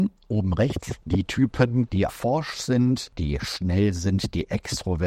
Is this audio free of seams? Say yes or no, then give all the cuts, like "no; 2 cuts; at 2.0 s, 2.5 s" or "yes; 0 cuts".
no; 1 cut; at 2.1 s